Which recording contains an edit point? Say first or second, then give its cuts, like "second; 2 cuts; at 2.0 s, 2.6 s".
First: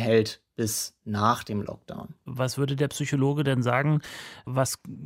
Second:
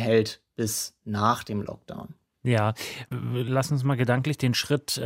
first; 1 cut; at 2.3 s